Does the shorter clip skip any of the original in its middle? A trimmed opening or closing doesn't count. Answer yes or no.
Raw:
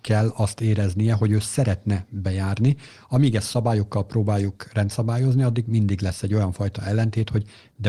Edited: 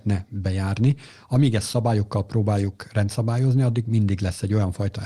no